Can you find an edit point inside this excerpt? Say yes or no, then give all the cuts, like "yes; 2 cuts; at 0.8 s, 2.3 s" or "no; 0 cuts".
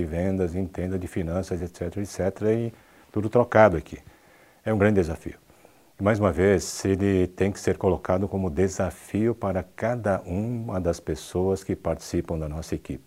no; 0 cuts